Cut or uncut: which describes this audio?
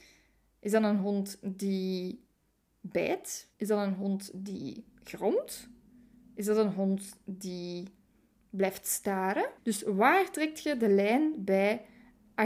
cut